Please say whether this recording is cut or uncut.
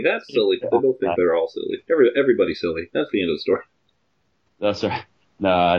uncut